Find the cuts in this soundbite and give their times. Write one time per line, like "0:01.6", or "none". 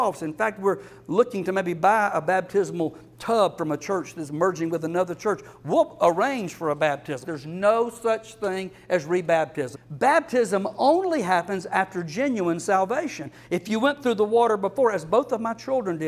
0:07.2
0:09.7